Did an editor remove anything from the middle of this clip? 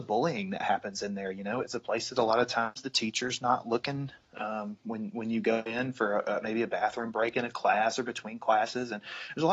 no; 0 cuts

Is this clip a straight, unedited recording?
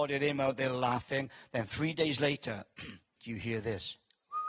no; 1 cut; at 3.2 s

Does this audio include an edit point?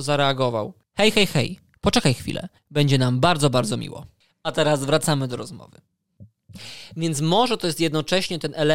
yes; 1 cut; at 2.6 s

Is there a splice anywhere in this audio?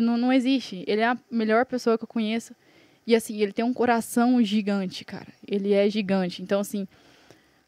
no; 0 cuts

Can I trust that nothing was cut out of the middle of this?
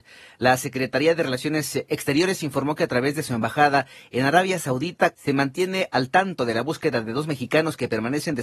no; 1 cut; at 5.1 s

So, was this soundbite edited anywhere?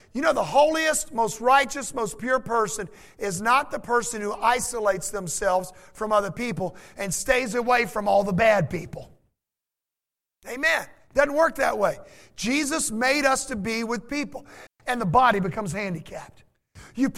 yes; 1 cut; at 14.7 s

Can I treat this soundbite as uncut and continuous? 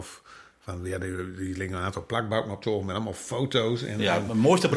yes; 0 cuts

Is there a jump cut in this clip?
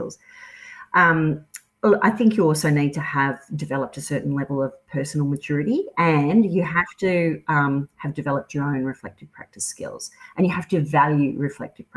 no; 0 cuts

